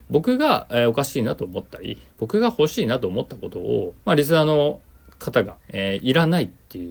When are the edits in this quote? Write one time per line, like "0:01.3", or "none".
0:04.0
0:05.6

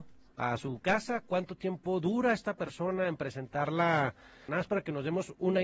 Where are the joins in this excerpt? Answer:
0:04.5

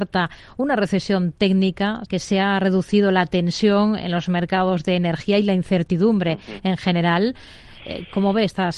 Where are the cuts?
0:02.1

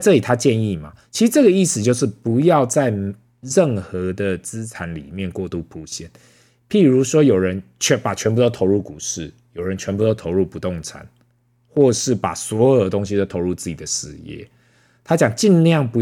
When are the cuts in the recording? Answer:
0:01.0

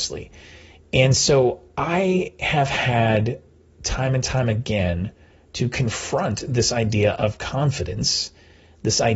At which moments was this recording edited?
none

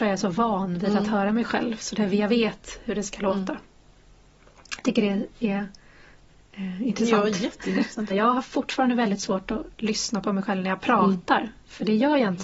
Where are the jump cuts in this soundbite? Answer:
0:08.1

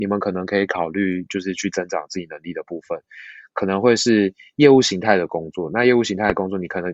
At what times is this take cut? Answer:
none

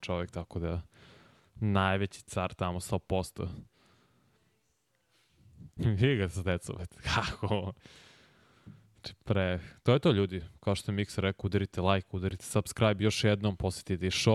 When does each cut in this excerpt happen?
none

